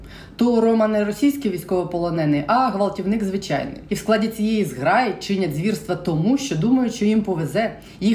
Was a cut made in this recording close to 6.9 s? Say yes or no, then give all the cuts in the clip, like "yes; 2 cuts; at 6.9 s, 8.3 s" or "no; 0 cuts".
no; 1 cut; at 3.9 s